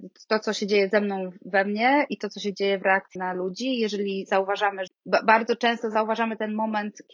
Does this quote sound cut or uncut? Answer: cut